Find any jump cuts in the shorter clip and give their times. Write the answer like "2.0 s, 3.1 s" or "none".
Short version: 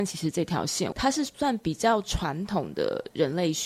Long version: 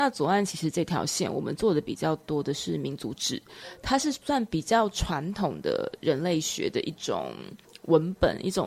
0.9 s